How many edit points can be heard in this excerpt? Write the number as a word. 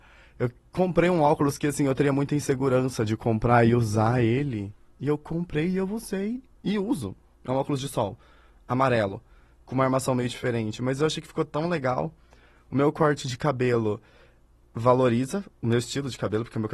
zero